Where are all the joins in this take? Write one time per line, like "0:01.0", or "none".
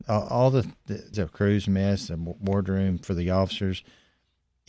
0:01.1